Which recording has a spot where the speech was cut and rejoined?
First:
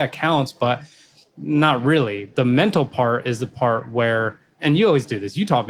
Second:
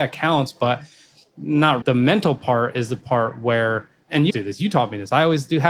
second; 2 cuts; at 1.8 s, 4.3 s

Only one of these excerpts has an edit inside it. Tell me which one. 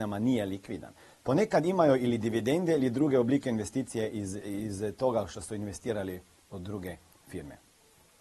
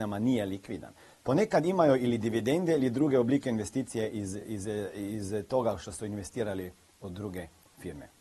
first; 1 cut; at 4.4 s

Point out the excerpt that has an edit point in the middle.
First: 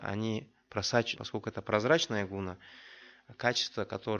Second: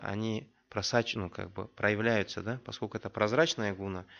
first; 1 cut; at 1.2 s

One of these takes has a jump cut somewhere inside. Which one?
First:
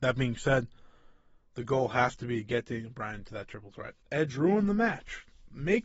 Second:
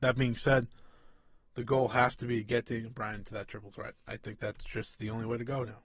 first; 1 cut; at 4.0 s

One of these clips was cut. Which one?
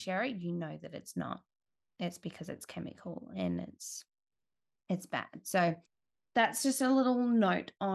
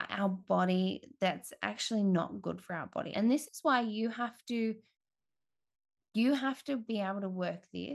second; 1 cut; at 3.1 s

